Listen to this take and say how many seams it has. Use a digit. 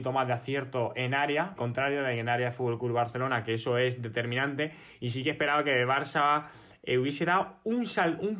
1